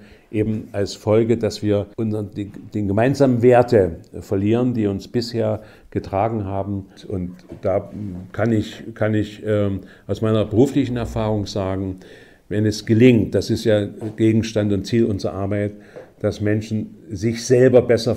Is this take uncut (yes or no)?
no